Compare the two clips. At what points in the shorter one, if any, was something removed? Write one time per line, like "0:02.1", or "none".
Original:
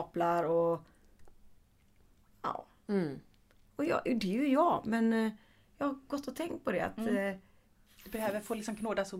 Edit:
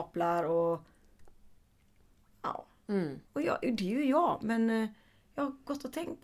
0:03.3